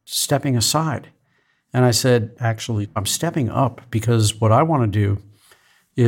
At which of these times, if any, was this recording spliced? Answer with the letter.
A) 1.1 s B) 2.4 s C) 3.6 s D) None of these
D